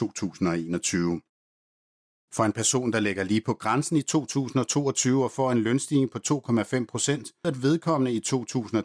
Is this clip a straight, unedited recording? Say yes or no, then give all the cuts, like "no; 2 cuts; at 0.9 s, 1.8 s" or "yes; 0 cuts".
no; 1 cut; at 7.4 s